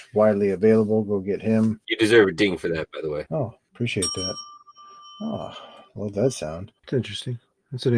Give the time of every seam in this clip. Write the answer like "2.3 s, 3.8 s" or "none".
6.8 s

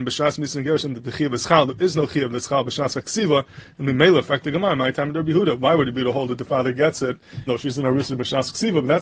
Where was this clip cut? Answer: 7.5 s

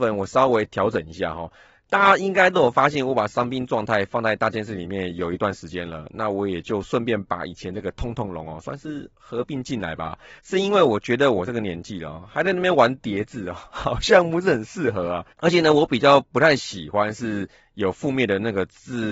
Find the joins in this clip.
10.4 s, 15.3 s

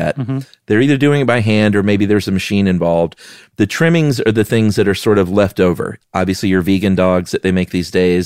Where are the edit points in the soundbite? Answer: 6.0 s

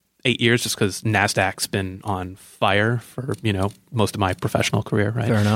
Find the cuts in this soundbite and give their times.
none

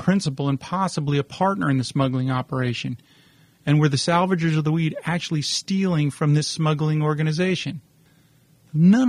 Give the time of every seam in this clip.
3.5 s

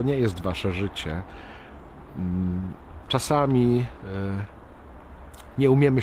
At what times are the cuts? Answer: 3.1 s

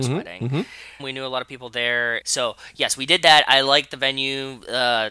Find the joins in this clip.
1.0 s, 2.2 s

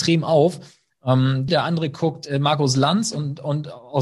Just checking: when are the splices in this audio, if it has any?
1.5 s

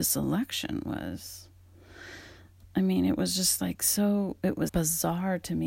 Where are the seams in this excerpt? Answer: 4.7 s

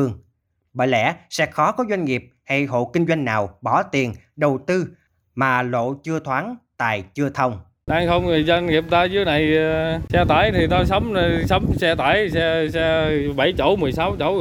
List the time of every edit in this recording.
7.9 s

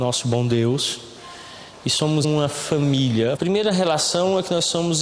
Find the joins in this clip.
2.2 s, 3.4 s

